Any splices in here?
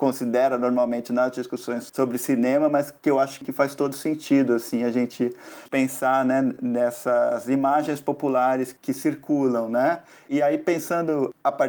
no; 0 cuts

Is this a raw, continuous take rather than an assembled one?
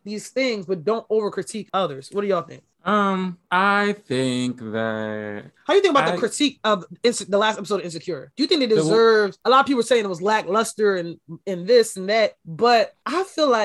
yes; 0 cuts

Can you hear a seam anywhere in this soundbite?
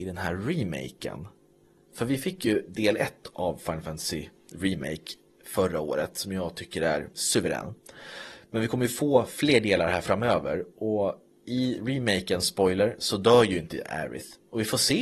yes; 1 cut; at 7.1 s

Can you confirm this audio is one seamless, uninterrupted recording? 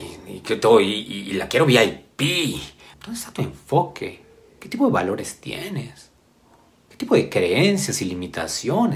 no; 1 cut; at 2.9 s

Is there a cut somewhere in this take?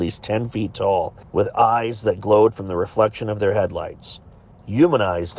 yes; 1 cut; at 1.2 s

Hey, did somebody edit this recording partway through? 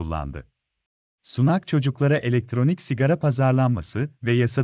yes; 1 cut; at 1.2 s

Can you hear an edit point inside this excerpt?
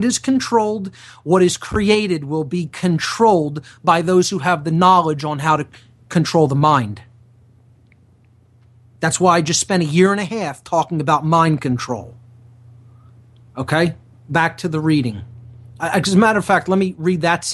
no; 0 cuts

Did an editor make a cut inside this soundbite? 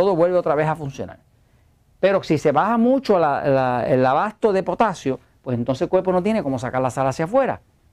no; 0 cuts

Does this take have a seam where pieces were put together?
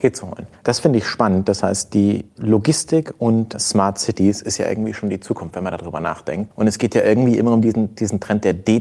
no; 0 cuts

